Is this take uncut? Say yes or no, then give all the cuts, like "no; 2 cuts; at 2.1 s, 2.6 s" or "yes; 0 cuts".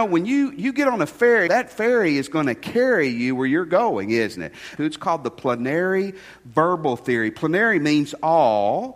no; 2 cuts; at 1.5 s, 4.8 s